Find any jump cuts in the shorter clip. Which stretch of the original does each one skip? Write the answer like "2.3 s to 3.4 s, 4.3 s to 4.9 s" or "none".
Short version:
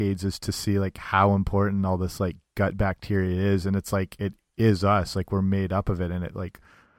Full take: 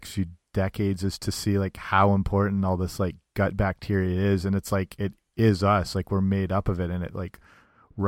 none